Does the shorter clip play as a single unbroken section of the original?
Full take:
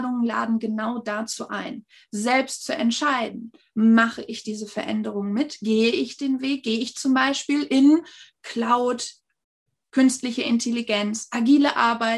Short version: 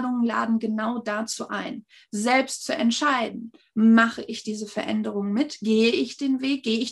yes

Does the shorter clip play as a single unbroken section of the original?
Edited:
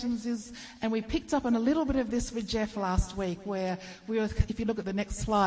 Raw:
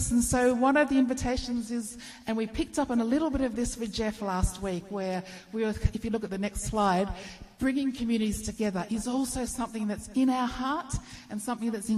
yes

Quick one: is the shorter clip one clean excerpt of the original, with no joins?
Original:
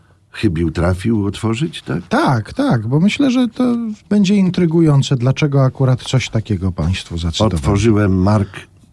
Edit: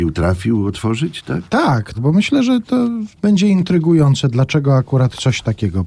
no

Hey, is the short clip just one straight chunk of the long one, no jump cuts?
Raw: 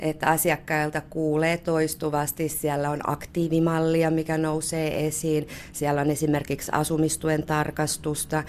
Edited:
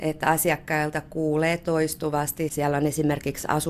no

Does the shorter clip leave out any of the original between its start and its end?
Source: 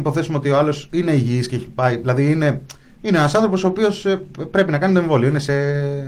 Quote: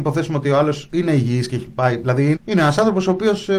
yes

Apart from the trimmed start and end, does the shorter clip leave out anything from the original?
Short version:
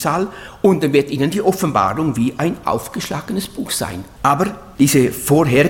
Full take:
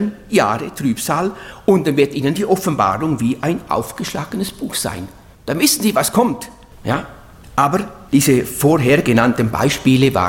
yes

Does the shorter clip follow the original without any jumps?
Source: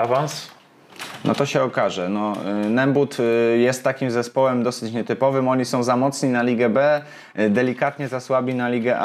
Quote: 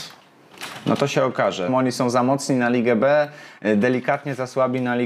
no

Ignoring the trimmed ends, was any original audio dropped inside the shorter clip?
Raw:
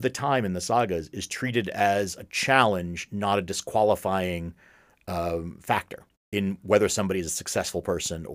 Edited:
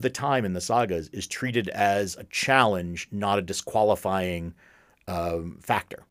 no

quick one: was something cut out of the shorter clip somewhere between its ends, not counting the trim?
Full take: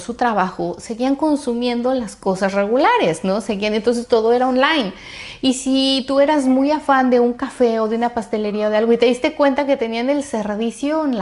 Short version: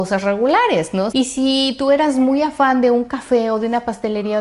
yes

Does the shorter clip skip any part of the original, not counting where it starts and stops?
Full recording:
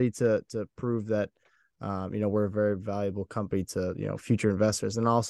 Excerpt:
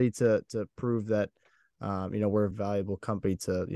yes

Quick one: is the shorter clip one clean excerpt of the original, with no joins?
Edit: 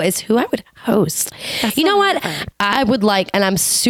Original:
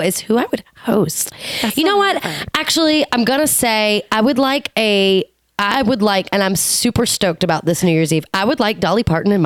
no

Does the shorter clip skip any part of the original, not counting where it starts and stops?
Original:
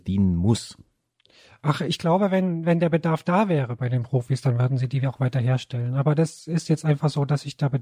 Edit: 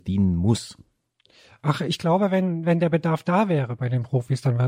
no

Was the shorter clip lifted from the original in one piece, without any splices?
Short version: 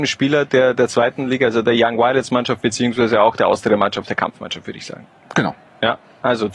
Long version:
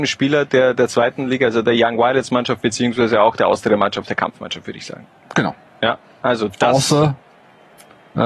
yes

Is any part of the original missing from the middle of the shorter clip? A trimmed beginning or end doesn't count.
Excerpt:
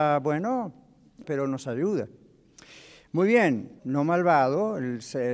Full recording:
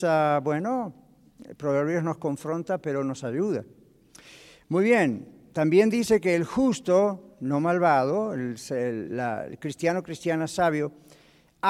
yes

